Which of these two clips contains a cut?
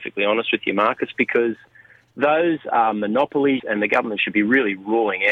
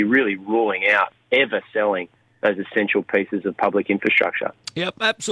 first; 1 cut; at 3.6 s

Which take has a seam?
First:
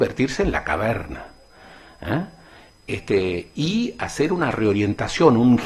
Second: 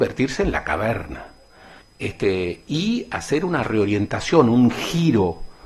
second; 1 cut; at 1.8 s

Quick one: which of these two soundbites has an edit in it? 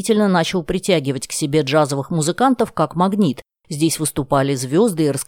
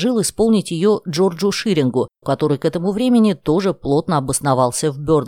second; 1 cut; at 2.2 s

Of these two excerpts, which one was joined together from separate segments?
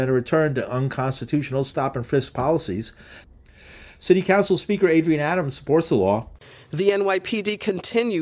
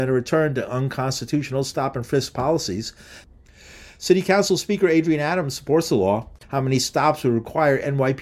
second; 1 cut; at 6.4 s

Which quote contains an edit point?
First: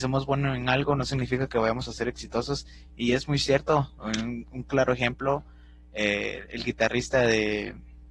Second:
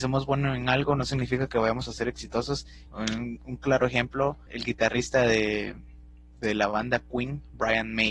second; 2 cuts; at 2.9 s, 4.5 s

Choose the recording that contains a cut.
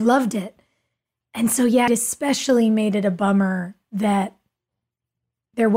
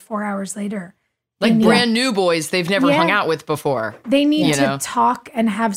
first; 1 cut; at 1.9 s

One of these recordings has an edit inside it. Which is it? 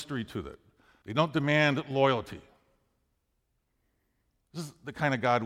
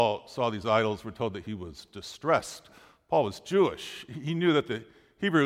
first; 1 cut; at 1.0 s

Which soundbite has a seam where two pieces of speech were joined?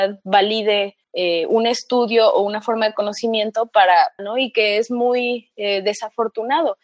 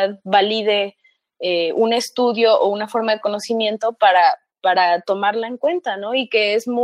first; 2 cuts; at 1.0 s, 4.2 s

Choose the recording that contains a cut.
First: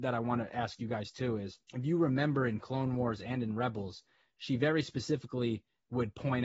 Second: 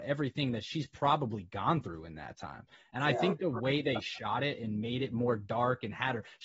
first; 1 cut; at 1.6 s

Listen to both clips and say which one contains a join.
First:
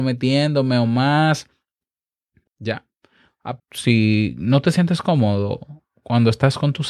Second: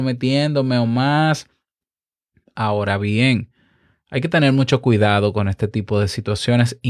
first; 2 cuts; at 2.5 s, 3.6 s

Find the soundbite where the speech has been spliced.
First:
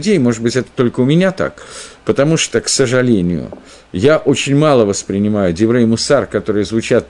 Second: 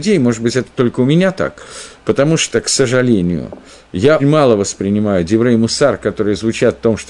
second; 1 cut; at 4.2 s

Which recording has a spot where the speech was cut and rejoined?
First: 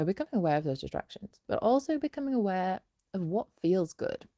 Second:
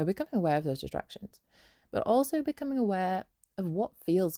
first; 1 cut; at 1.4 s

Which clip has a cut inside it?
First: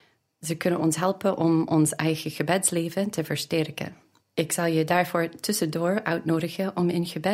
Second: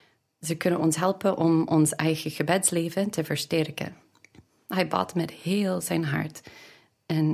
first; 1 cut; at 4.2 s

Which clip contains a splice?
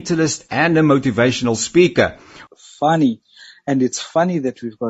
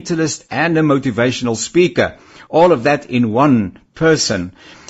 first; 1 cut; at 2.5 s

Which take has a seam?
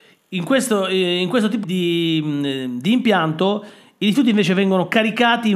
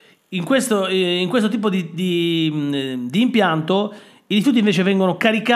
first; 1 cut; at 1.6 s

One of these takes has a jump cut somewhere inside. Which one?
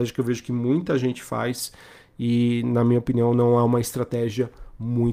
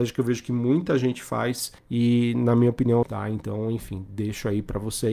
second; 2 cuts; at 1.8 s, 3.0 s

